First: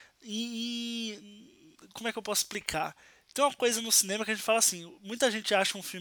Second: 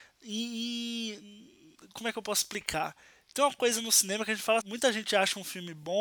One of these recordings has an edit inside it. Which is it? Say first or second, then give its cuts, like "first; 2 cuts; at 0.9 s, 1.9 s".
second; 1 cut; at 4.6 s